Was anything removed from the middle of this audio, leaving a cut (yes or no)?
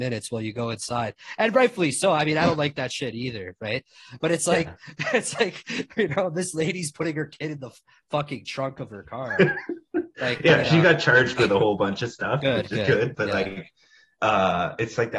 no